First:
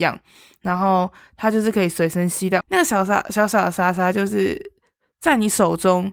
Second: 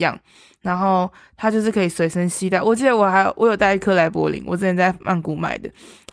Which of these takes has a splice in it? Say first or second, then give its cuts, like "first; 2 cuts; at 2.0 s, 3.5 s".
first; 1 cut; at 2.6 s